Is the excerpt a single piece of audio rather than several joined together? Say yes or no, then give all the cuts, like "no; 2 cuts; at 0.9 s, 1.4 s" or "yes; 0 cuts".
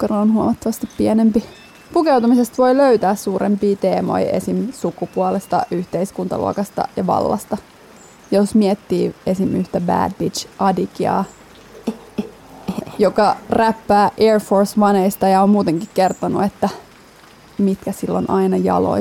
yes; 0 cuts